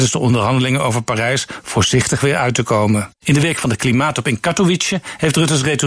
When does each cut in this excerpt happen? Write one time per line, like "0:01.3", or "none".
0:03.2